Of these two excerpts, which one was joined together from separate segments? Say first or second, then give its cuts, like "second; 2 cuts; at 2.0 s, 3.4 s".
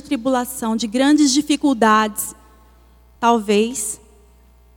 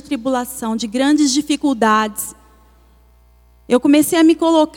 first; 1 cut; at 3.2 s